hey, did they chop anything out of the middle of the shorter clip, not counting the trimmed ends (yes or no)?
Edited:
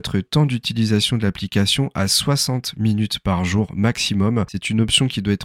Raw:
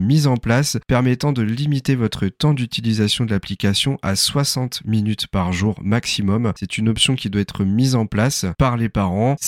no